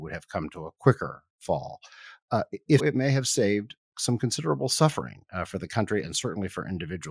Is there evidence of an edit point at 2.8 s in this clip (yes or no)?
yes